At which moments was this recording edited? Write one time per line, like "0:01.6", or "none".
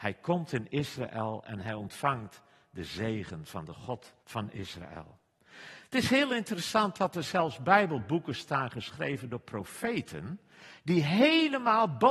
0:04.2